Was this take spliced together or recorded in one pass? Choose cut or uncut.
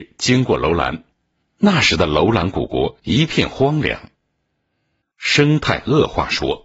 cut